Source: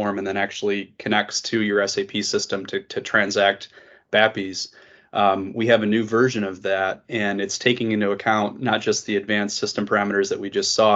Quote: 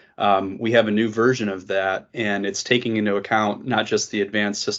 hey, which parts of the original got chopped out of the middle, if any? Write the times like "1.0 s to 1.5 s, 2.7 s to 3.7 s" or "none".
none